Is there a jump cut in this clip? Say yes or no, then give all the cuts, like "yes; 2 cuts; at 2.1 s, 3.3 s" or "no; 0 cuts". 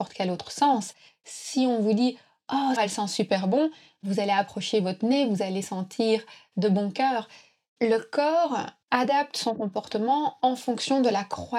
yes; 2 cuts; at 2.8 s, 8.8 s